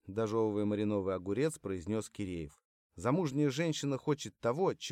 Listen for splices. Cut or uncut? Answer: cut